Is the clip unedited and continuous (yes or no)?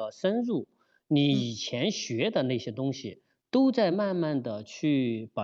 yes